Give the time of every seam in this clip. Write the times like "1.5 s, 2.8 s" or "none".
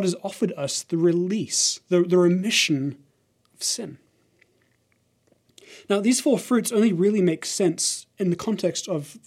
none

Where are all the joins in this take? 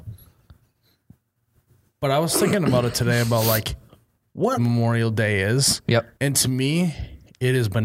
4.6 s, 6.2 s

